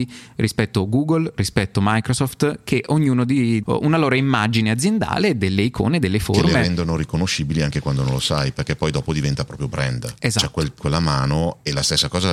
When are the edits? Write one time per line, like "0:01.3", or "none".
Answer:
0:03.6
0:10.8